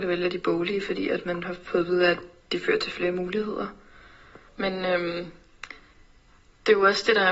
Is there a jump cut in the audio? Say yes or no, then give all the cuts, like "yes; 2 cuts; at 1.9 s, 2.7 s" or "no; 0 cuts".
yes; 1 cut; at 4.5 s